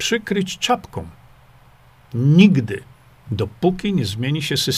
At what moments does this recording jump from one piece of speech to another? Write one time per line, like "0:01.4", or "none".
0:02.0

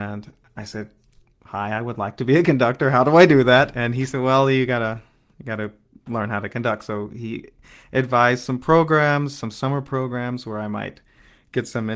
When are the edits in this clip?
none

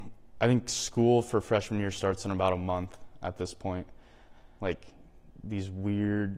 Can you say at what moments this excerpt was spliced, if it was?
0:04.6

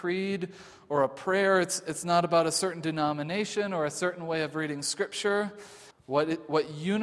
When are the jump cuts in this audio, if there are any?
0:05.9

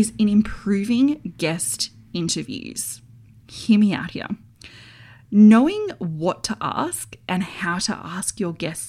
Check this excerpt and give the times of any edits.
none

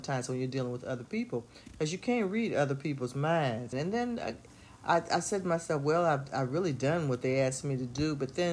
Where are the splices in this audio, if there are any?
0:03.7

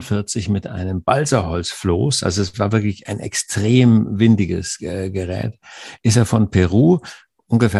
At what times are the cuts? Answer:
none

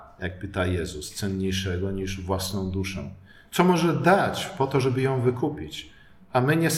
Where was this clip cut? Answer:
none

